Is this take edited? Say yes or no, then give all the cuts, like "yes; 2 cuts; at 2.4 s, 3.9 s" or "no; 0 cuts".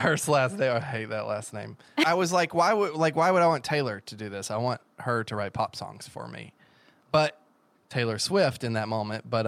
yes; 1 cut; at 7.7 s